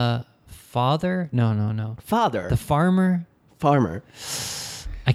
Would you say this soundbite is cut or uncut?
uncut